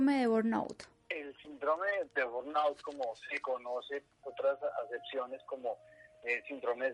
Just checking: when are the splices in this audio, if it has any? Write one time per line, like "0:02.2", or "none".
0:02.1
0:04.2